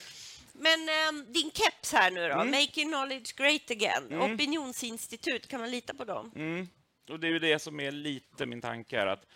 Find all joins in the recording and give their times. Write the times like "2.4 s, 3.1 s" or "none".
none